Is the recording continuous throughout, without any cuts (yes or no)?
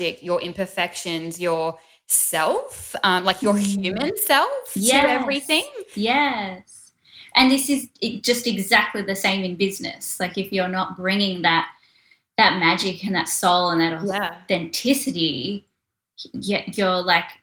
yes